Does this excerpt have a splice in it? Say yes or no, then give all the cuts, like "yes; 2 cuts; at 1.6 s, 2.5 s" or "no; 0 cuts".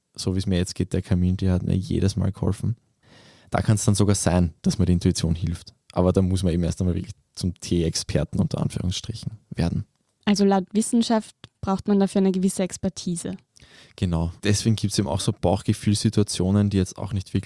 yes; 1 cut; at 14.4 s